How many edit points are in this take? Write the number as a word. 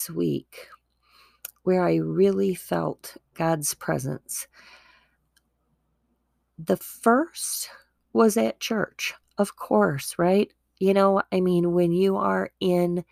zero